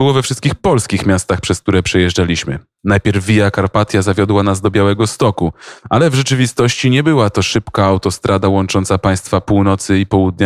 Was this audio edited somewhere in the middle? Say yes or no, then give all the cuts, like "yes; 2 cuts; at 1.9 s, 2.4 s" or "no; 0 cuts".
no; 0 cuts